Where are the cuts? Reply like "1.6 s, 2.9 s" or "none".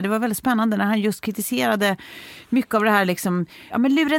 none